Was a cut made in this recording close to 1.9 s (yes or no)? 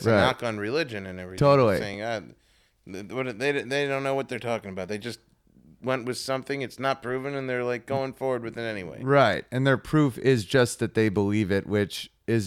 no